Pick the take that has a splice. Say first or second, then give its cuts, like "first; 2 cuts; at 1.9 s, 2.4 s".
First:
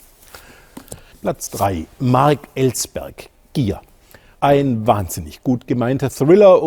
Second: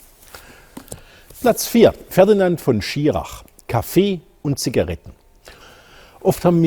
first; 1 cut; at 1.1 s